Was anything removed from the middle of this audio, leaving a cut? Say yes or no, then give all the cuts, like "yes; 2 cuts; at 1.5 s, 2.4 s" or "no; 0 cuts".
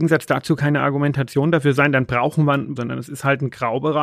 yes; 1 cut; at 2.8 s